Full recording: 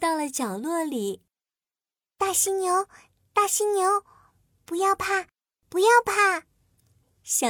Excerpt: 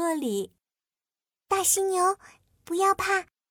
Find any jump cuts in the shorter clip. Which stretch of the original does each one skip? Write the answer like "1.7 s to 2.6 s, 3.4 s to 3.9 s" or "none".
3.2 s to 4.5 s